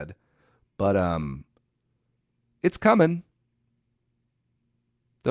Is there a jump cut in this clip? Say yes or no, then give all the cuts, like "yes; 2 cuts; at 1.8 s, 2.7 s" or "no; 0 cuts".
no; 0 cuts